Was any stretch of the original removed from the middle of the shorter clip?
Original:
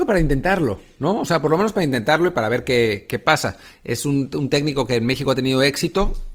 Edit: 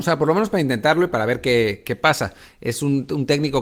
no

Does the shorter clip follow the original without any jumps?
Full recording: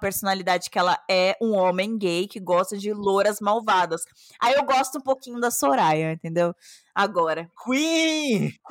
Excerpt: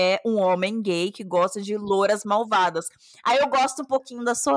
yes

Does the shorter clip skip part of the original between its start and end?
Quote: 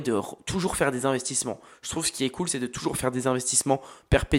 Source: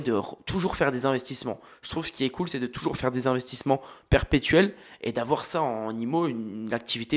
no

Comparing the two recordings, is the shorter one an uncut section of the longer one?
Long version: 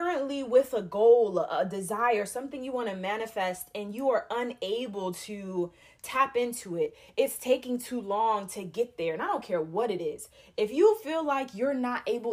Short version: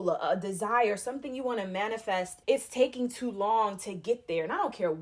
no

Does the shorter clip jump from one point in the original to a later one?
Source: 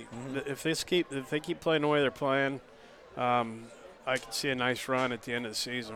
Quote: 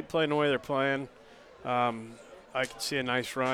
no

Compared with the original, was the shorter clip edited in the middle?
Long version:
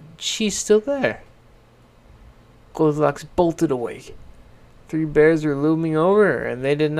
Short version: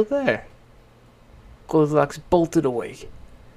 yes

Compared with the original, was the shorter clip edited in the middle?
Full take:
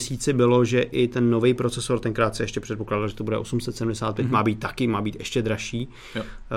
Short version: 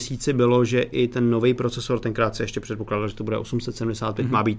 no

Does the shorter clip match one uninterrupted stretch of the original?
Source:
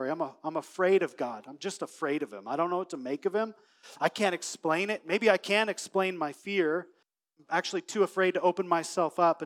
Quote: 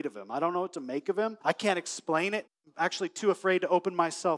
no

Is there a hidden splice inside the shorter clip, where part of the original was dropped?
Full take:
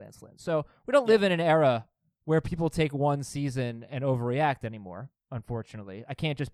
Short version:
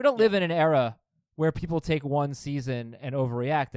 no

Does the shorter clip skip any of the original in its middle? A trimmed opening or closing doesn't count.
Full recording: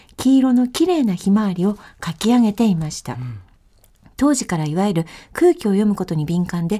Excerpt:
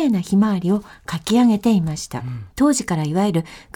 yes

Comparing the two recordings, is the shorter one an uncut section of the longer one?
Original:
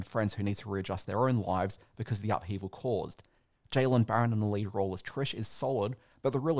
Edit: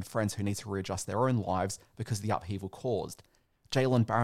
yes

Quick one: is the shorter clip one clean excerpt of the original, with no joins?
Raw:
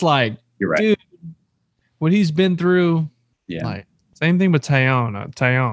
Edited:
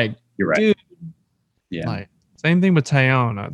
no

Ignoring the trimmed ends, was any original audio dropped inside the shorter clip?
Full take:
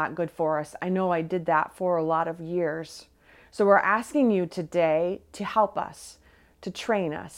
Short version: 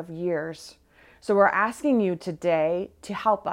no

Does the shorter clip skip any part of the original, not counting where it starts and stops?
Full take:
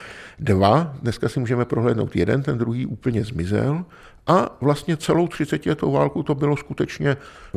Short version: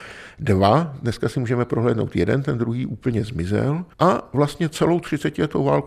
yes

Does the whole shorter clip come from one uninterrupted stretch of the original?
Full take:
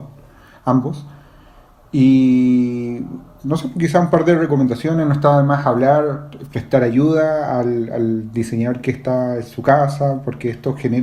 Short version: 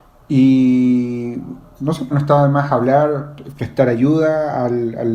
no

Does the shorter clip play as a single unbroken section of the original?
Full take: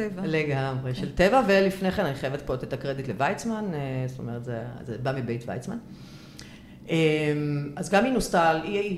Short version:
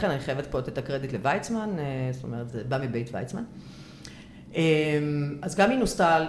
no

